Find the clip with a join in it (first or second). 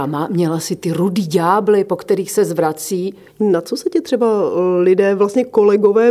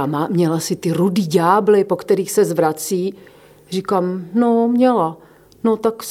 first